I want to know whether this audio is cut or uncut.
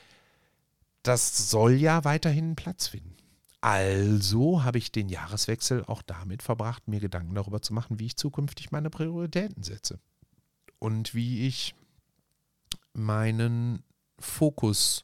uncut